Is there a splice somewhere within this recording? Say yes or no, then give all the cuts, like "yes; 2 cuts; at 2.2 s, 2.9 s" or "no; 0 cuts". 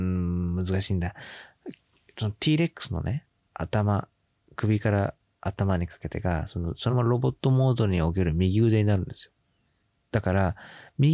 yes; 1 cut; at 6.9 s